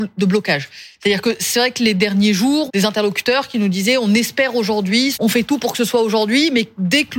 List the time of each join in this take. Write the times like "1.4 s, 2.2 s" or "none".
2.7 s, 5.1 s